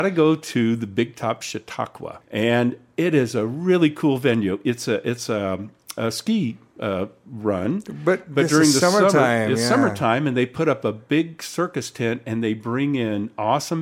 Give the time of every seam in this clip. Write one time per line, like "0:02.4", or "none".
0:02.2